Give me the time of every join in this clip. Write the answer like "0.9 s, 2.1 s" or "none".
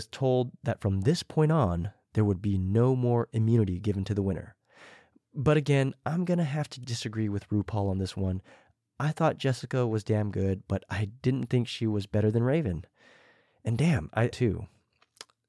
14.3 s